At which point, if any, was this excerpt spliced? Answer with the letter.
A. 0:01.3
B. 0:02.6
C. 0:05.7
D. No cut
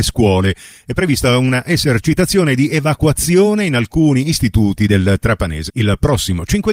C